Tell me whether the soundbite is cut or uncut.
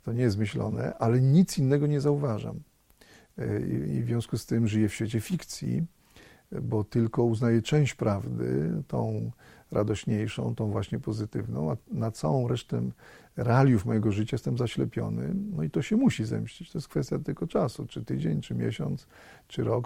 uncut